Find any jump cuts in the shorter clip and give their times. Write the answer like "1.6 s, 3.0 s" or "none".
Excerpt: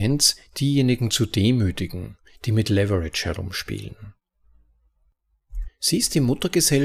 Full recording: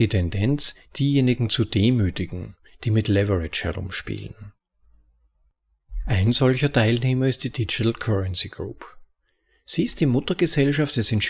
5.6 s